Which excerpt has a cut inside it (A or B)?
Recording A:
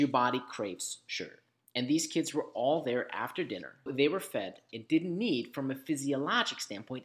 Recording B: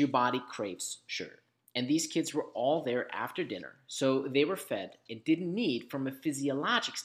A